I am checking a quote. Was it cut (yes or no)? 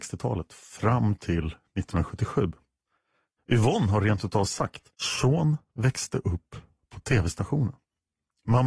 yes